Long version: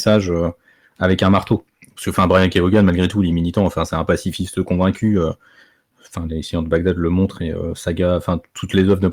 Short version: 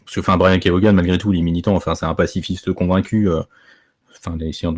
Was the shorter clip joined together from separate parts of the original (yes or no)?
no